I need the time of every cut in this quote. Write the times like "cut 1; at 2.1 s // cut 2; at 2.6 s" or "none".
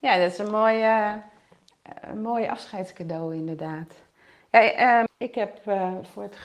cut 1; at 5.1 s